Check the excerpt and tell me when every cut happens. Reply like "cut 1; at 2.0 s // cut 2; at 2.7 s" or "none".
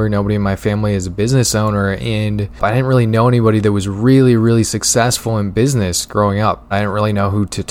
cut 1; at 6.7 s